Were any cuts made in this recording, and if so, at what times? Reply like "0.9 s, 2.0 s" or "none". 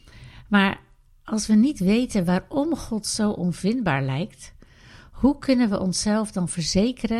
none

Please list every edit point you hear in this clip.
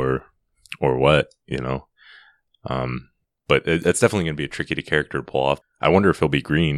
5.6 s

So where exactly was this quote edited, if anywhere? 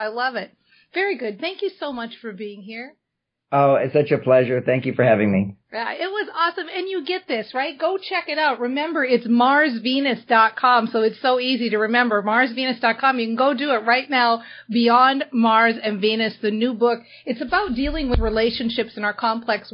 none

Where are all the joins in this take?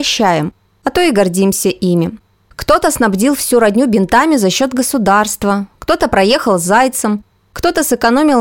none

